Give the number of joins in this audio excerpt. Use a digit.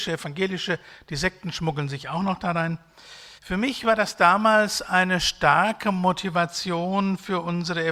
1